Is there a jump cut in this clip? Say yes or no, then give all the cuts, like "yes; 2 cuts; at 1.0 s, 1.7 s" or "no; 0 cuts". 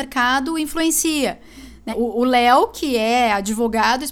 yes; 1 cut; at 1.9 s